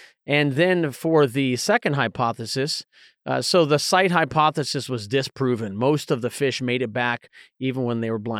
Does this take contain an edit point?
no; 0 cuts

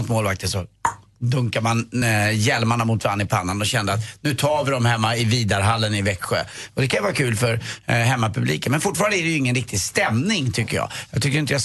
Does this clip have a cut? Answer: no; 0 cuts

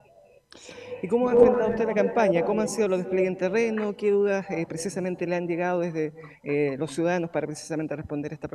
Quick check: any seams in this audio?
no; 0 cuts

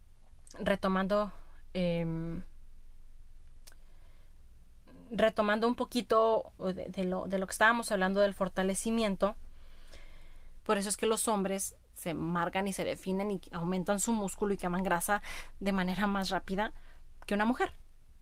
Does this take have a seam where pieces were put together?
yes; 1 cut; at 10.6 s

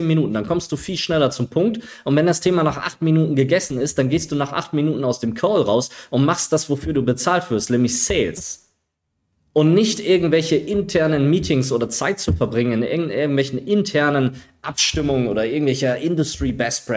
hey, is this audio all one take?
yes; 0 cuts

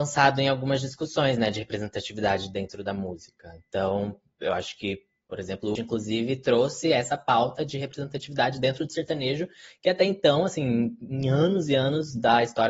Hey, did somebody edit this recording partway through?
yes; 1 cut; at 5.7 s

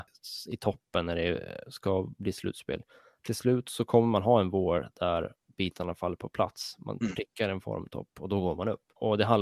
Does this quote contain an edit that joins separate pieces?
no; 0 cuts

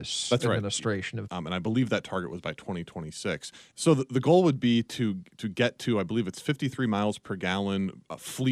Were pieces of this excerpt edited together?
yes; 2 cuts; at 1.3 s, 3.7 s

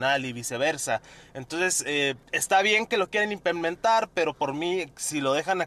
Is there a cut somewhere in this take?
yes; 1 cut; at 2.2 s

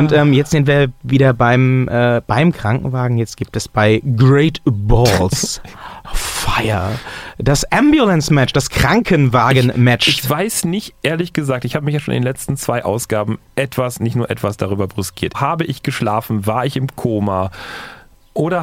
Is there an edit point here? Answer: yes; 2 cuts; at 13.5 s, 15.3 s

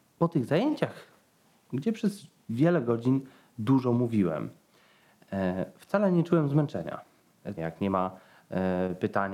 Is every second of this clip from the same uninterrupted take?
no; 1 cut; at 7.6 s

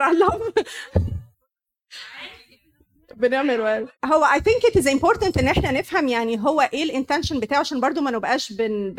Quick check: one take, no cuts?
no; 2 cuts; at 1.3 s, 4.0 s

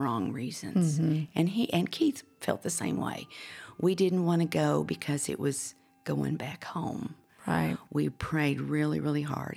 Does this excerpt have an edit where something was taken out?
no; 0 cuts

